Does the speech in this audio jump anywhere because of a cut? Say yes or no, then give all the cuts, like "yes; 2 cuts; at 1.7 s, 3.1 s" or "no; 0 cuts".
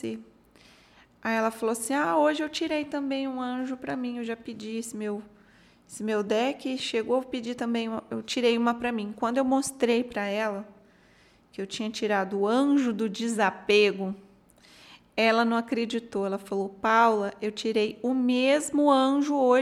no; 0 cuts